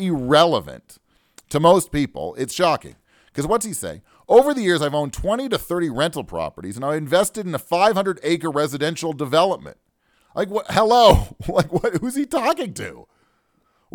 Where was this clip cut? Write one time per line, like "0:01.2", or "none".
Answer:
0:10.1